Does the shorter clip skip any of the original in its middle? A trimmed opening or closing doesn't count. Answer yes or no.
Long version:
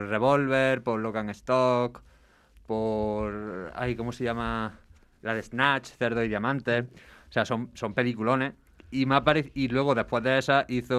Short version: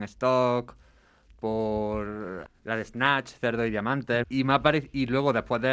yes